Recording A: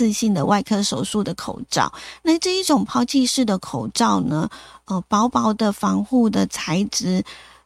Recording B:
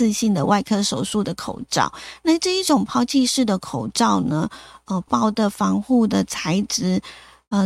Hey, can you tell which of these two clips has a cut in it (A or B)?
B